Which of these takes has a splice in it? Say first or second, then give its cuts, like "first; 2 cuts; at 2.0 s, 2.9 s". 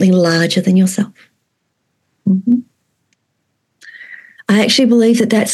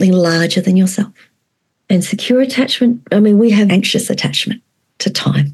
second; 2 cuts; at 1.8 s, 3.7 s